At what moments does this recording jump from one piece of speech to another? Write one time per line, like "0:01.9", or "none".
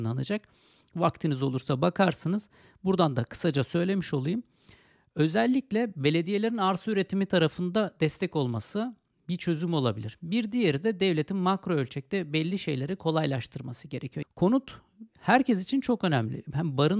0:14.2